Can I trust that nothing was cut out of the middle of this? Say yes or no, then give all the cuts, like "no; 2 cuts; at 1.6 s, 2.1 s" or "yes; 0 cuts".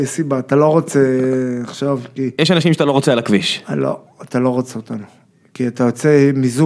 yes; 0 cuts